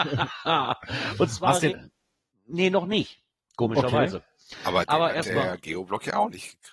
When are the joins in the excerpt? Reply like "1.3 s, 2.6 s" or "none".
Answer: 1.7 s